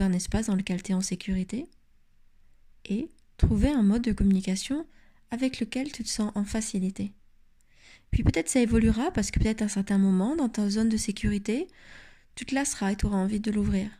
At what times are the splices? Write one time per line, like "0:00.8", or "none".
none